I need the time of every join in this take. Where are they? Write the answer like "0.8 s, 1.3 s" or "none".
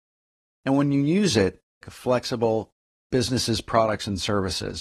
1.8 s